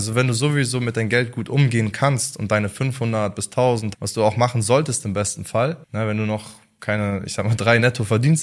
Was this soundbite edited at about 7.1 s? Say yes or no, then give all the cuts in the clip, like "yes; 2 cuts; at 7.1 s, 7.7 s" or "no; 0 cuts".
no; 2 cuts; at 3.9 s, 5.8 s